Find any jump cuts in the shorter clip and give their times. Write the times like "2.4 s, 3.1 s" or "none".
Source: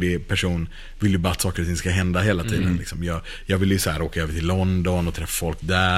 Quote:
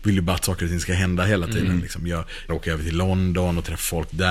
2.5 s